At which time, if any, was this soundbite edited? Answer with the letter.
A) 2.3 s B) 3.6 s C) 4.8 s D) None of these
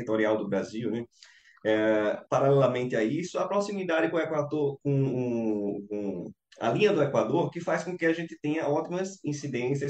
A